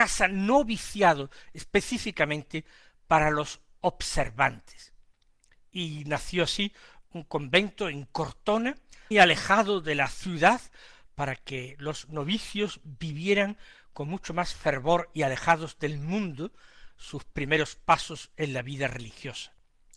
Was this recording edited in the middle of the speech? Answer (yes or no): yes